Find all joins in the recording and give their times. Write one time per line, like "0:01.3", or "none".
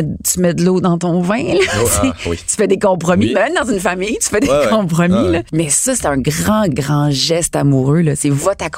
0:06.7